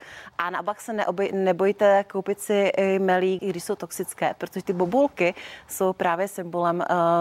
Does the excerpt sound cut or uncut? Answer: cut